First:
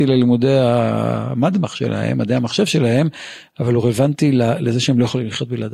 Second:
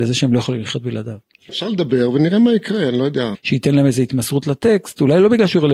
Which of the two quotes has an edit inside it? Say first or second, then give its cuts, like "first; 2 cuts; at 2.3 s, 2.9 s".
second; 2 cuts; at 1.4 s, 3.3 s